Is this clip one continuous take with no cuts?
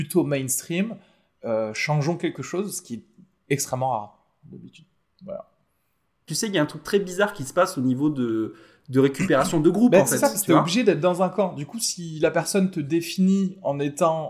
no; 1 cut; at 6.3 s

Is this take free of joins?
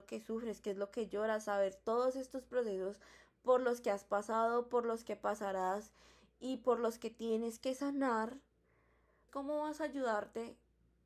no; 1 cut; at 9.3 s

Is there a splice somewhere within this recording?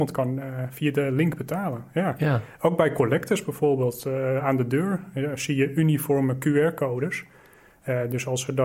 no; 0 cuts

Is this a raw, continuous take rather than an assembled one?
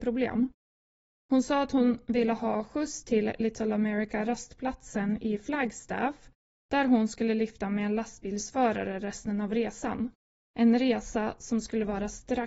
yes; 0 cuts

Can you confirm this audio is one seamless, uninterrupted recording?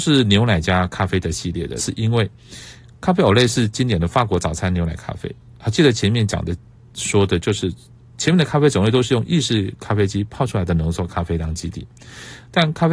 no; 1 cut; at 1.8 s

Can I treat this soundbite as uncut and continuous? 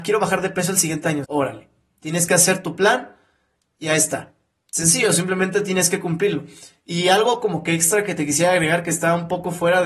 no; 1 cut; at 1.2 s

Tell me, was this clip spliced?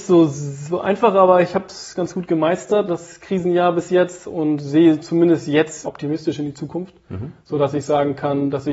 yes; 1 cut; at 2.9 s

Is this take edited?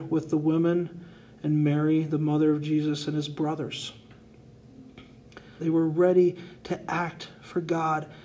yes; 1 cut; at 5.6 s

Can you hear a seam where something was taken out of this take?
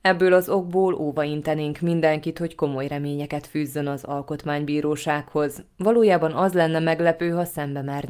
no; 0 cuts

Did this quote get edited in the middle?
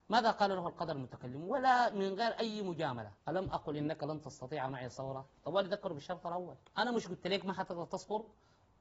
yes; 2 cuts; at 3.2 s, 6.7 s

